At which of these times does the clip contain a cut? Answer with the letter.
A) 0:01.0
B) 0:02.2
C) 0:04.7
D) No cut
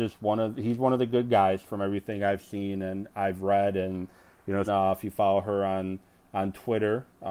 C